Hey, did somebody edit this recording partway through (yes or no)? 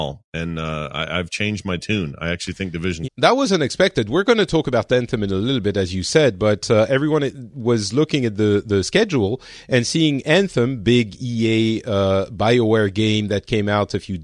yes